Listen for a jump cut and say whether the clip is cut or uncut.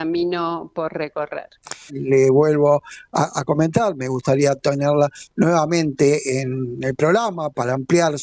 cut